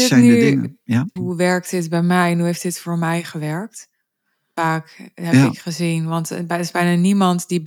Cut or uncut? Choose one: cut